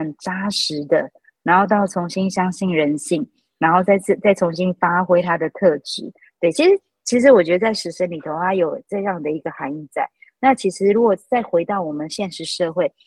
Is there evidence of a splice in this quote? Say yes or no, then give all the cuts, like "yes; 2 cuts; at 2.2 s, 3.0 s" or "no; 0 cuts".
no; 0 cuts